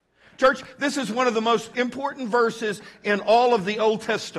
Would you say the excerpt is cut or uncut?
uncut